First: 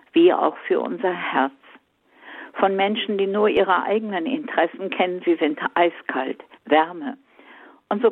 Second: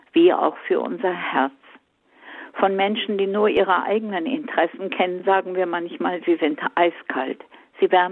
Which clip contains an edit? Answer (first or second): first